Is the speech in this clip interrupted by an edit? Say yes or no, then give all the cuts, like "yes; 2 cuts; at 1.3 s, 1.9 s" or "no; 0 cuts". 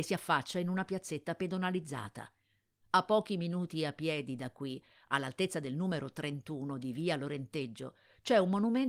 no; 0 cuts